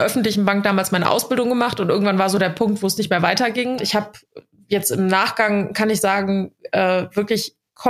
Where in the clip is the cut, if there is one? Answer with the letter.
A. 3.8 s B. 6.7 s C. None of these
A